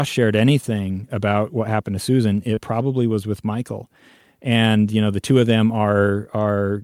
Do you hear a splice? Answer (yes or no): no